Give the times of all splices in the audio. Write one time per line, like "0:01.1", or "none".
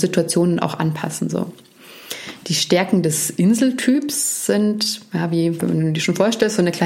none